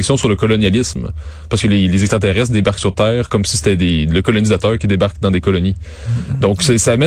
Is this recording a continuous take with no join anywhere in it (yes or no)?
yes